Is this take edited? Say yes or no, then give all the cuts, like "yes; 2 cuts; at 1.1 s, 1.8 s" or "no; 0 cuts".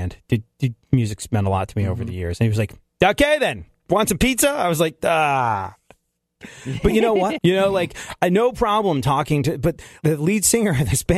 yes; 2 cuts; at 7.4 s, 10.0 s